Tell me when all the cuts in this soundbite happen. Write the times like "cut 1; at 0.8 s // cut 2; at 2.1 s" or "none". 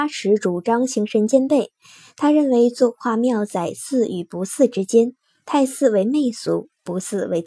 none